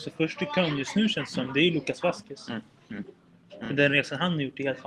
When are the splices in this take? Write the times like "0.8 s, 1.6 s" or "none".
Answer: none